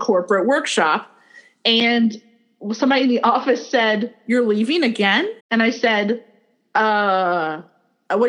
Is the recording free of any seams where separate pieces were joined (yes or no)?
no